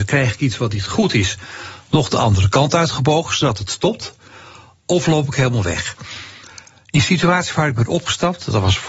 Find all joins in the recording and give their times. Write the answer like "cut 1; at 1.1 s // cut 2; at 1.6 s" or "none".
none